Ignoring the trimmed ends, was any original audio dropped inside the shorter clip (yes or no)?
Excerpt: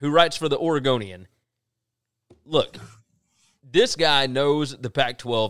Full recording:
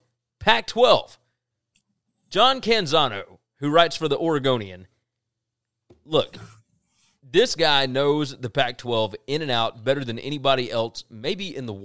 no